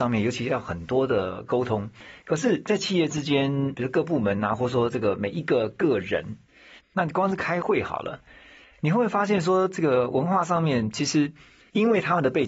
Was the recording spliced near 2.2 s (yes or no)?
no